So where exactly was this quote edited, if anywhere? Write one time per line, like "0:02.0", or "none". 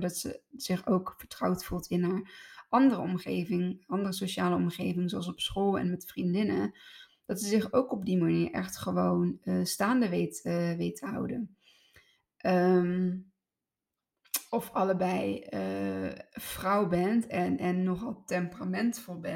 0:14.5